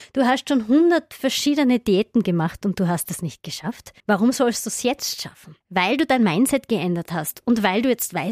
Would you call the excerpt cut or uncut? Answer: cut